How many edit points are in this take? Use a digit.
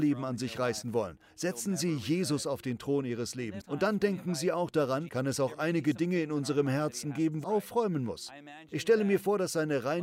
3